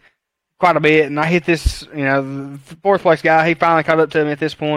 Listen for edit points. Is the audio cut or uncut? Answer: uncut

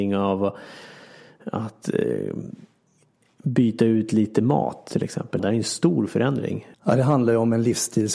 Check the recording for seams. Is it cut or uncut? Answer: cut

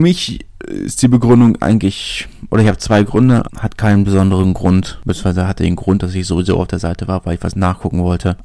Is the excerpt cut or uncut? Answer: cut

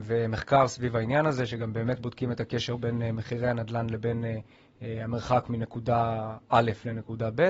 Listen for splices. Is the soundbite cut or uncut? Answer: uncut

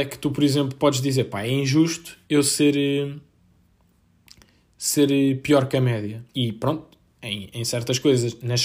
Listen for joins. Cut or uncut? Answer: cut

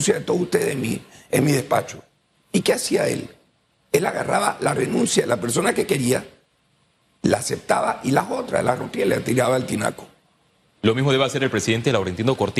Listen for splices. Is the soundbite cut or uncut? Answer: uncut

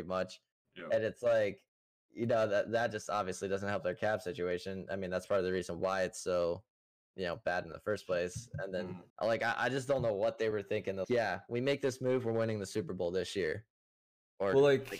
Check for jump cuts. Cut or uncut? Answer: cut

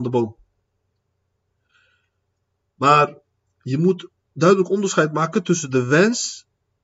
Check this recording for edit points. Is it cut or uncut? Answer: uncut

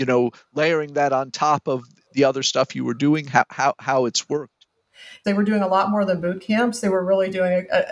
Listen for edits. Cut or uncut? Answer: cut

